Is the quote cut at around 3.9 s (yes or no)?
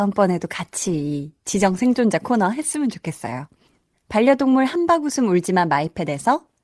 yes